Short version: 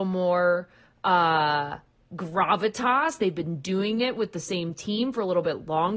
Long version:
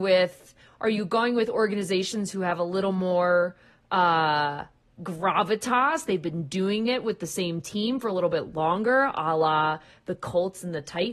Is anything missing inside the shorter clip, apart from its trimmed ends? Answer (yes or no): no